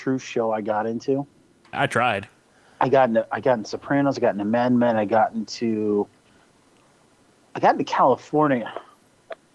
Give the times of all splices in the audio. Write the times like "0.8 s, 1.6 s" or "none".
1.7 s